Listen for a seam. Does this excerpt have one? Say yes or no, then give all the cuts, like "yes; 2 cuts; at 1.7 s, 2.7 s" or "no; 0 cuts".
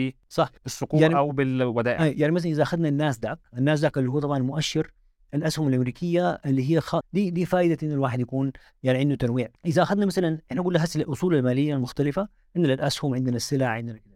yes; 2 cuts; at 7.0 s, 9.6 s